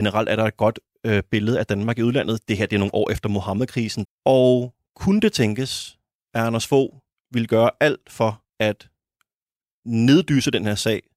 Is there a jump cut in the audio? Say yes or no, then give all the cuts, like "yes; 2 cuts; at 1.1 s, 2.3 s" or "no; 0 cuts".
yes; 2 cuts; at 4.0 s, 8.5 s